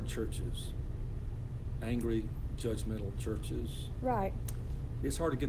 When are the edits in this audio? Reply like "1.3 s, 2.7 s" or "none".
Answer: none